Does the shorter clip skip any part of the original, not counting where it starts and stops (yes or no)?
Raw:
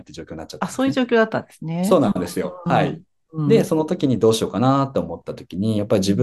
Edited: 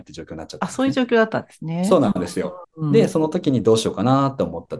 yes